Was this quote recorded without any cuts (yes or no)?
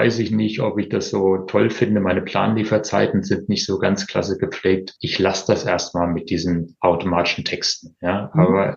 yes